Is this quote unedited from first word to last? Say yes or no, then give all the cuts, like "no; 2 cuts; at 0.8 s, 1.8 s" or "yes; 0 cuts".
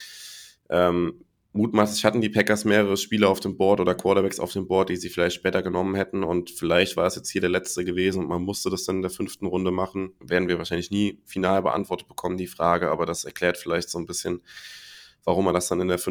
no; 1 cut; at 10.2 s